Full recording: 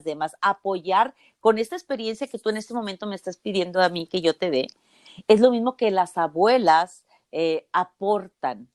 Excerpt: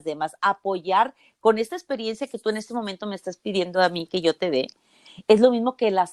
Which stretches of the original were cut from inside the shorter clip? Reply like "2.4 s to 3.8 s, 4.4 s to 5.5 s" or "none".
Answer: none